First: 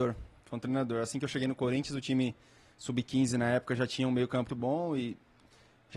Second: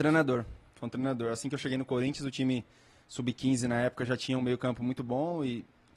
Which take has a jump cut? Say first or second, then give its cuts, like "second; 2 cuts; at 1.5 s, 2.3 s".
first; 1 cut; at 4.5 s